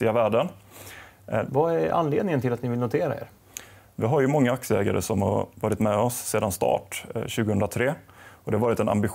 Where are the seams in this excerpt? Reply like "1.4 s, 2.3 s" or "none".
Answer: 1.5 s